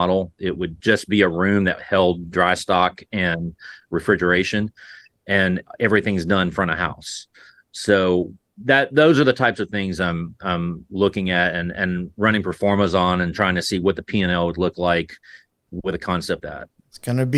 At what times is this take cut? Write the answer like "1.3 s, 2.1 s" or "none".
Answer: 16.4 s